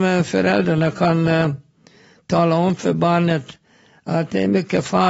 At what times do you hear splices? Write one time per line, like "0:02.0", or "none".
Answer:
none